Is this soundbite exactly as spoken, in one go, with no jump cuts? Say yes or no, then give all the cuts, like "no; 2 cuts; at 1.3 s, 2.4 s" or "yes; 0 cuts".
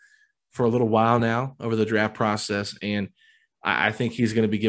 yes; 0 cuts